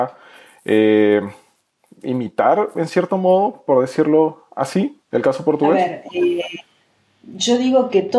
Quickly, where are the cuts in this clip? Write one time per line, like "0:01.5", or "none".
0:05.0